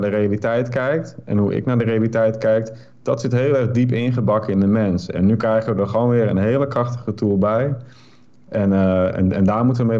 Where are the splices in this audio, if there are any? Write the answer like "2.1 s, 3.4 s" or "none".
none